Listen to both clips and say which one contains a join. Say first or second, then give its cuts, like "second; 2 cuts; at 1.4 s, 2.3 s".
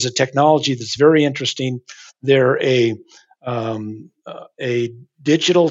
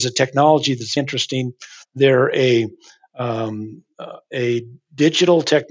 second; 1 cut; at 1.0 s